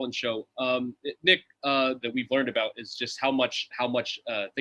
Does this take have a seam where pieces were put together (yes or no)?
yes